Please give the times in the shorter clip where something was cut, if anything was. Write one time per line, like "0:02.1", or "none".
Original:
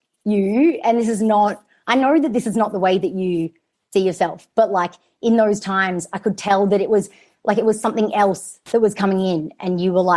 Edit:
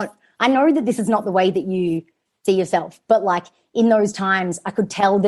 none

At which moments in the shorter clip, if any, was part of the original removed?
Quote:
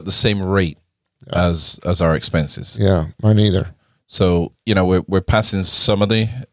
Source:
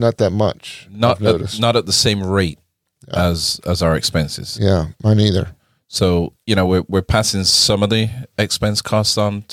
none

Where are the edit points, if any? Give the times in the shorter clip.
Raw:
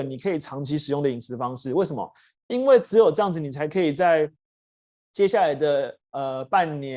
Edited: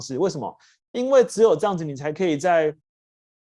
none

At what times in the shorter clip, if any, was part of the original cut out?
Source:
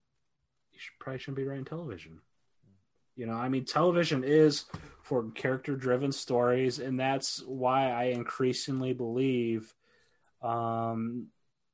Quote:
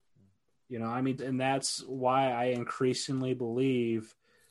0:01.2

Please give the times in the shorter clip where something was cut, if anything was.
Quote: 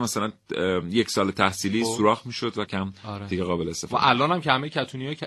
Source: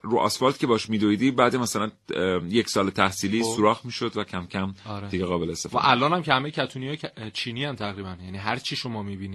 0:02.7

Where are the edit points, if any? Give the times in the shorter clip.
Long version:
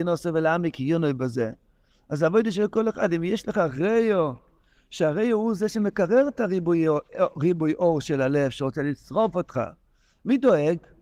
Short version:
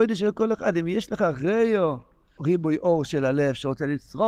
0:02.4

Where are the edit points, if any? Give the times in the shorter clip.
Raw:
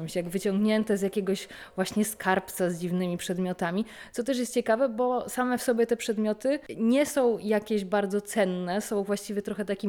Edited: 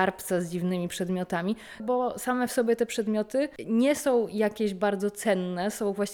0:01.8

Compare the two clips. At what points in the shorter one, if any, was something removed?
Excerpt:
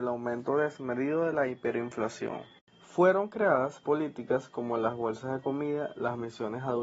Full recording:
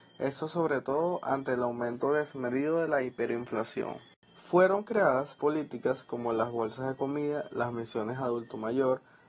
none

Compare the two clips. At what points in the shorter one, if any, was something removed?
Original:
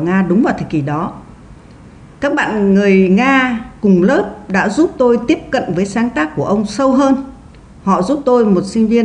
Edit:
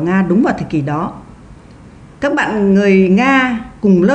none

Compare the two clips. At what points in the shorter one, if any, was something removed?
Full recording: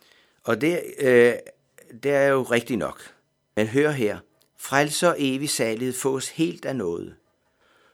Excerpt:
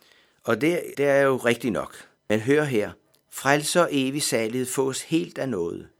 0:00.9
0:02.2

